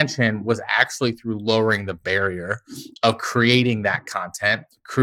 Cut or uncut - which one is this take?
uncut